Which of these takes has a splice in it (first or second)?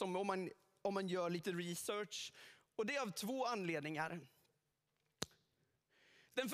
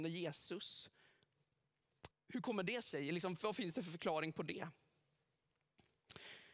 second